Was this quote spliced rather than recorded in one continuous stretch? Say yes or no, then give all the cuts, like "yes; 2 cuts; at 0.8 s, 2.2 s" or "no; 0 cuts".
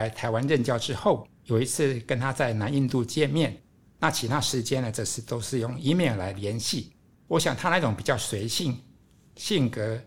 yes; 1 cut; at 7.1 s